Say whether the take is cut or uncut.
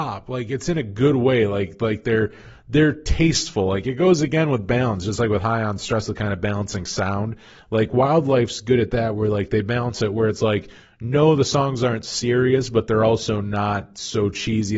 uncut